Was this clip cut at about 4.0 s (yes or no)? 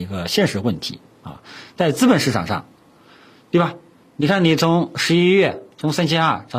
no